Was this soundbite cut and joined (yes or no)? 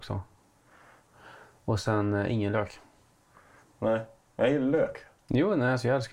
no